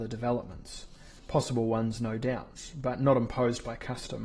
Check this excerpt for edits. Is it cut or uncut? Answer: uncut